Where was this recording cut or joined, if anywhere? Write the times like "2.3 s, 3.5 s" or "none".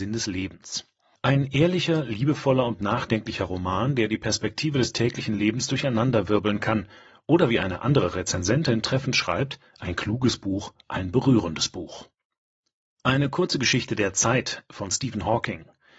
none

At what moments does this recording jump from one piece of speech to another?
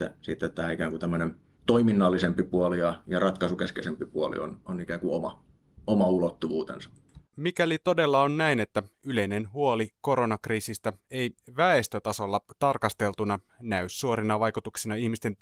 none

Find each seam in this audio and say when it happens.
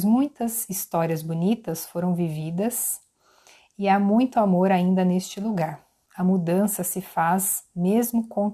6.1 s

